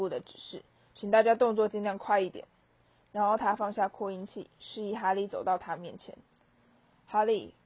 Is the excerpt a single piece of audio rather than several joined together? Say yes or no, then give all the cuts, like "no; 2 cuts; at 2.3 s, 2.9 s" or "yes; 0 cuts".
yes; 0 cuts